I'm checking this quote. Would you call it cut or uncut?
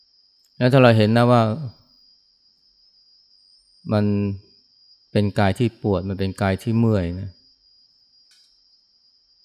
uncut